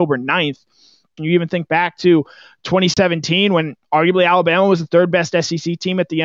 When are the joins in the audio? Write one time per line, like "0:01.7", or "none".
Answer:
0:01.2